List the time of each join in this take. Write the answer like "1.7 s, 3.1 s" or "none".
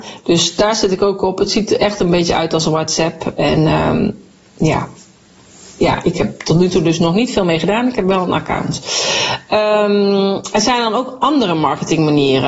none